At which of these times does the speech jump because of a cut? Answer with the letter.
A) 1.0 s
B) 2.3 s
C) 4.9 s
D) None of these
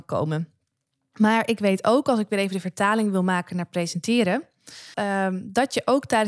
C